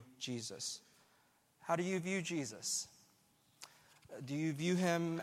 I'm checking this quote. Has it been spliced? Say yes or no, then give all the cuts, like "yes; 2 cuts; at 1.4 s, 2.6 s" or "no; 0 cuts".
no; 0 cuts